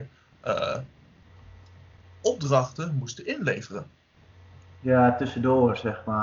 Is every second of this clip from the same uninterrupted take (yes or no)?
yes